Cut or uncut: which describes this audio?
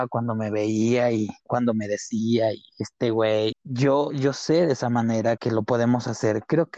cut